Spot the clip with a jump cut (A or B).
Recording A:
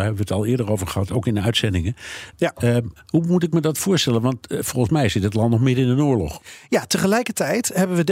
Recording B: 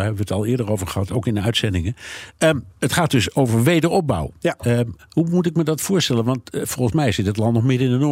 A